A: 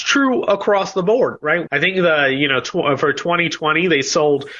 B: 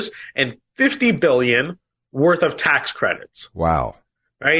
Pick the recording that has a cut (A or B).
A